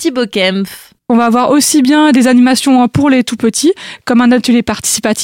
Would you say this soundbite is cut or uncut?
uncut